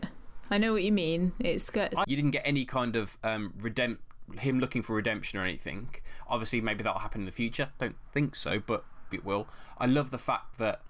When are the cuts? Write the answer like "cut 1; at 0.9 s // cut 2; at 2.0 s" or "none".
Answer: cut 1; at 2.0 s // cut 2; at 9.1 s